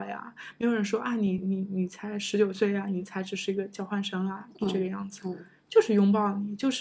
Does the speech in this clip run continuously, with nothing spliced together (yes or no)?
yes